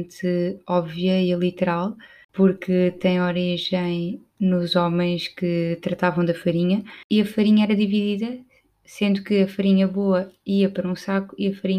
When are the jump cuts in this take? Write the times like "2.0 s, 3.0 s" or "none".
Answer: none